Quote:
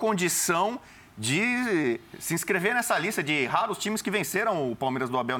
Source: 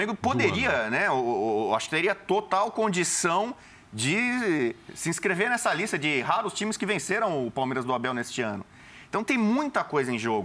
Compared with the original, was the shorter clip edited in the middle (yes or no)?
no